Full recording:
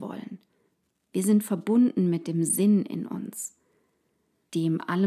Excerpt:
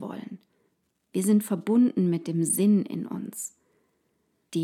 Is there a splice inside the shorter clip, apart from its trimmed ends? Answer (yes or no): no